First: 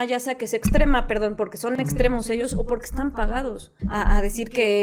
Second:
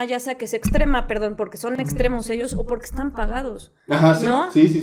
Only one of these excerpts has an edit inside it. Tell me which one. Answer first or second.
first